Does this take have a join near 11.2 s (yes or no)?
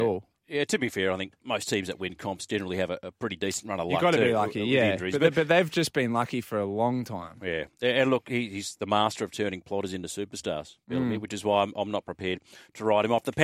no